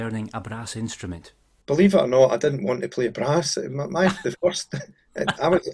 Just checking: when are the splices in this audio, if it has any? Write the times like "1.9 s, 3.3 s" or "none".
none